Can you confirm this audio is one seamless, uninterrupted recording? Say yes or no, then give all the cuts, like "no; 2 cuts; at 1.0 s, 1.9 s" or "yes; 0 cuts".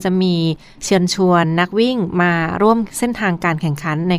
yes; 0 cuts